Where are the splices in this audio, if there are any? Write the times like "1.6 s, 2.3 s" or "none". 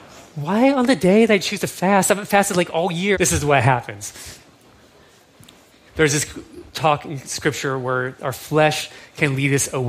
3.1 s, 5.9 s, 8.2 s